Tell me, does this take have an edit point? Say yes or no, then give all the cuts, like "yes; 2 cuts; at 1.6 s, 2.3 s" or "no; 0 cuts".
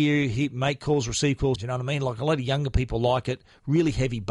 yes; 1 cut; at 1.6 s